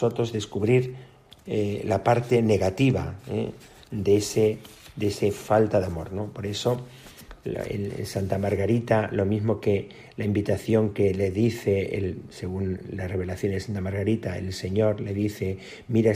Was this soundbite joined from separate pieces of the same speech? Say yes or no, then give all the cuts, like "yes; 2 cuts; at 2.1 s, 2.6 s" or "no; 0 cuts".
no; 0 cuts